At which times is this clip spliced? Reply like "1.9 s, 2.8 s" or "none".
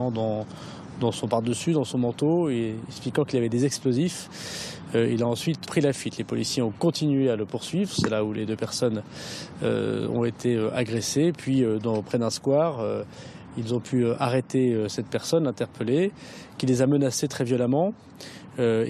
5.6 s